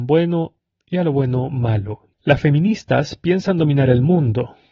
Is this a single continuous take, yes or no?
no